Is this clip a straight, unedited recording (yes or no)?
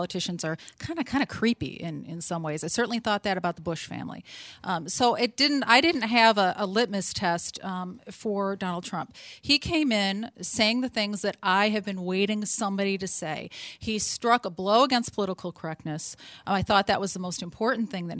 yes